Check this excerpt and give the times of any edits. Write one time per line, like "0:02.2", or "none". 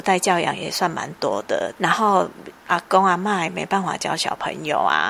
0:01.8